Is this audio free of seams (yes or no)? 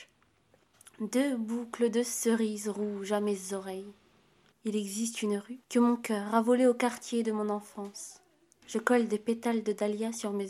no